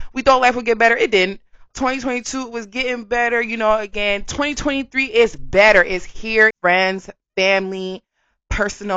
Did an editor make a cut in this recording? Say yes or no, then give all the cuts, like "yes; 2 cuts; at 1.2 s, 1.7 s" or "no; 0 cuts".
yes; 2 cuts; at 1.7 s, 6.5 s